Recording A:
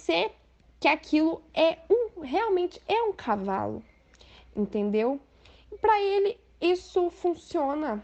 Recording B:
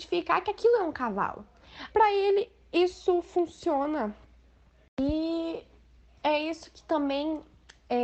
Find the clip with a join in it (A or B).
B